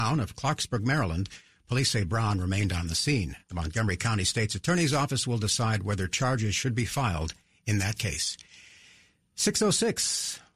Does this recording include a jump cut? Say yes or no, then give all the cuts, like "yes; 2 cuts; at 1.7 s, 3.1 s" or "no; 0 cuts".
no; 0 cuts